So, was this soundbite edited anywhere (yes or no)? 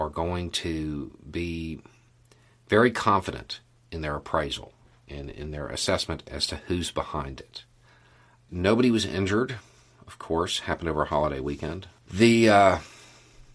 yes